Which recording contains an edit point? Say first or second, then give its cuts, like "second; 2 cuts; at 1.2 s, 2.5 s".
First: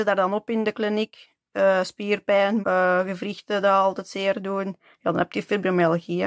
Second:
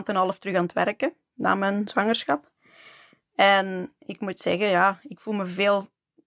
first; 1 cut; at 2.6 s